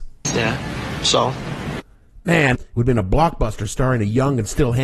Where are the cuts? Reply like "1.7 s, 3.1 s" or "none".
2.5 s

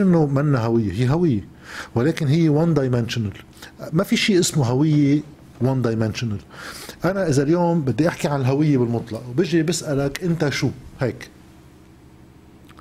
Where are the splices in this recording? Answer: none

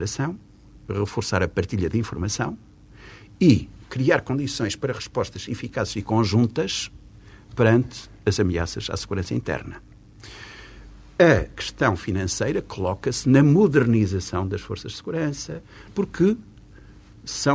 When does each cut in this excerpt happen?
15.9 s

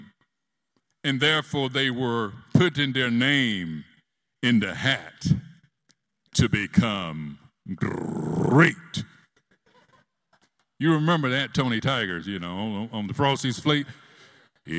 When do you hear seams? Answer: none

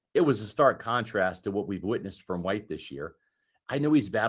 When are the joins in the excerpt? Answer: none

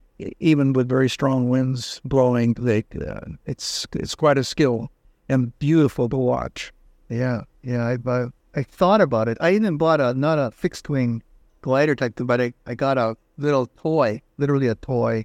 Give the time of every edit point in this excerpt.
none

